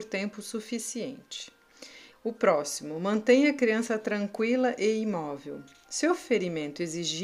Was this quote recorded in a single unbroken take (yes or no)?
no